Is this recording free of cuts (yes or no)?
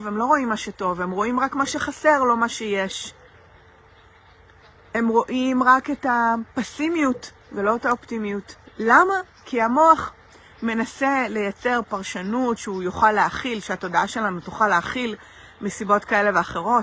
no